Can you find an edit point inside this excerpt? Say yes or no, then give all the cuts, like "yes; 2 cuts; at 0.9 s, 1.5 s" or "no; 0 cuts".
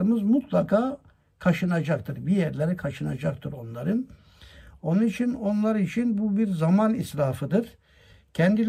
no; 0 cuts